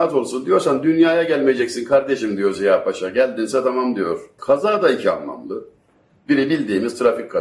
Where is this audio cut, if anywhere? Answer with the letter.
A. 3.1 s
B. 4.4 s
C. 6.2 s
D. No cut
B